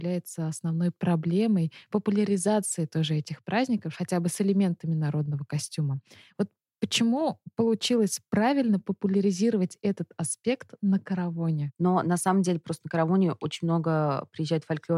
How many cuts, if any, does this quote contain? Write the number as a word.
one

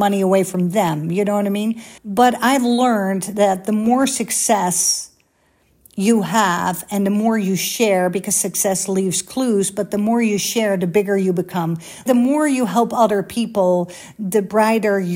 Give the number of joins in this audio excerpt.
two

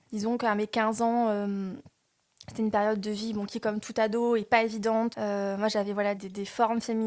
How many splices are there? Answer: two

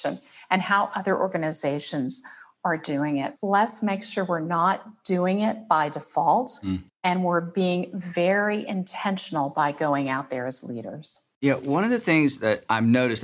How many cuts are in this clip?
one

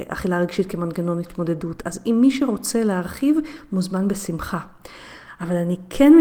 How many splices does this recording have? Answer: zero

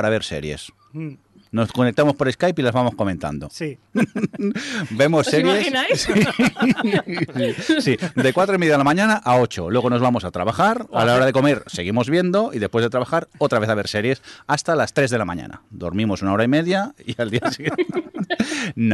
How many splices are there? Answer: one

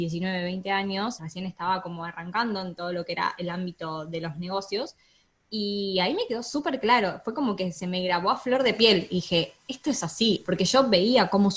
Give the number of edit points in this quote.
two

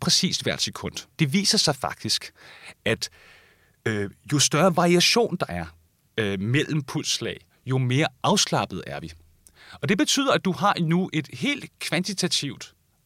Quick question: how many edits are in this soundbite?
one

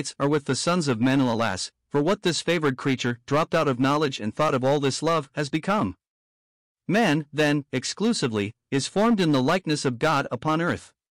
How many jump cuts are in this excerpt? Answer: zero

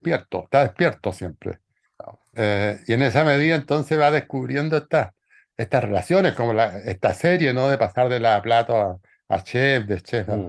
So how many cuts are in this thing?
zero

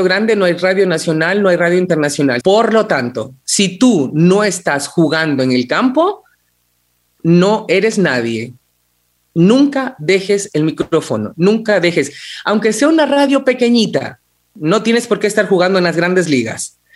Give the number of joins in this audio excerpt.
one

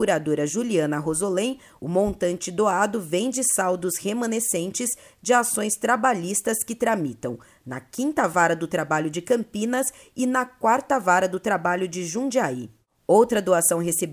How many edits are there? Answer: one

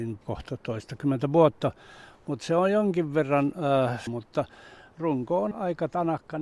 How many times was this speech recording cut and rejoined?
two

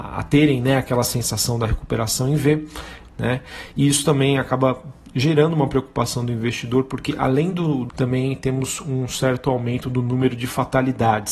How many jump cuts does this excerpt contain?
two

